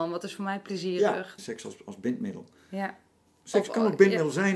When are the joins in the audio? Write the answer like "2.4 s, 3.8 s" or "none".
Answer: 1.4 s